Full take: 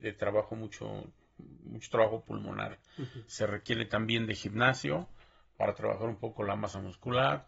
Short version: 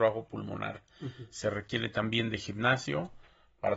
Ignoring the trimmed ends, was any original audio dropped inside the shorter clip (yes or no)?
no